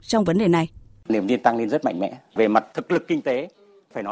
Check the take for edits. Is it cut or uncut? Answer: uncut